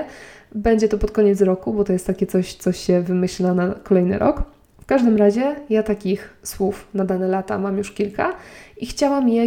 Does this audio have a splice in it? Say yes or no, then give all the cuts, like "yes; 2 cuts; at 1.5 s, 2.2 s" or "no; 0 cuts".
no; 0 cuts